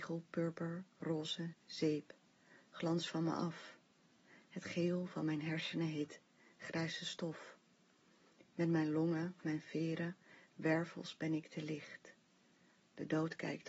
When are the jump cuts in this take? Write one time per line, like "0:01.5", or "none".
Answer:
0:01.5